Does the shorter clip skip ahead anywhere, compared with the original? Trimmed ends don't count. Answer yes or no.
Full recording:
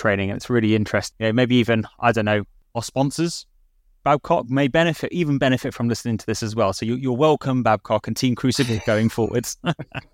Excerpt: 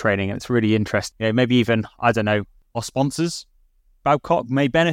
no